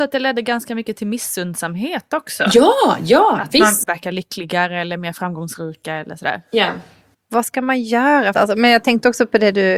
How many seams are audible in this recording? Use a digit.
3